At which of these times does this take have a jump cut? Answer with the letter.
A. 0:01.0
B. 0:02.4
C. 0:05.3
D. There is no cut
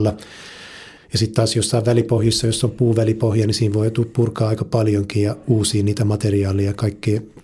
A